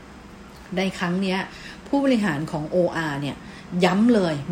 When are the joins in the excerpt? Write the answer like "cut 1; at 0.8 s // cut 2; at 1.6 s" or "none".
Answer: none